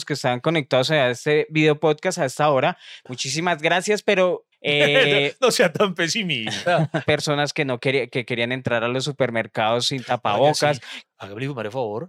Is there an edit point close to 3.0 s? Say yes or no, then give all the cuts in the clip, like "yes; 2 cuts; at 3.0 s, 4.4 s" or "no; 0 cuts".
no; 3 cuts; at 4.5 s, 7.0 s, 11.0 s